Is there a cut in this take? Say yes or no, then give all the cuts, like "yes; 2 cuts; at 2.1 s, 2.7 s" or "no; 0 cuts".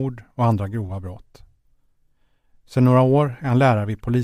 no; 0 cuts